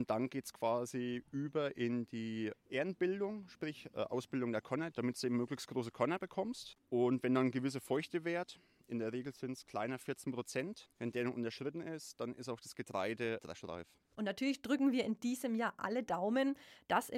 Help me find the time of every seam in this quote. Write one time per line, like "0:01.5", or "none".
0:04.9
0:13.4